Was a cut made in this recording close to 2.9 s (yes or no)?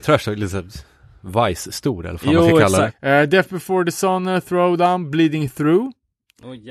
yes